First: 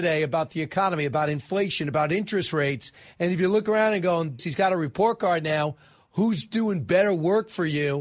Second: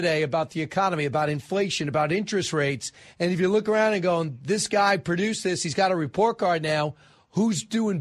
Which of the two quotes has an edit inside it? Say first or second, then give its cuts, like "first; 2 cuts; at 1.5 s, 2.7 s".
first; 1 cut; at 4.4 s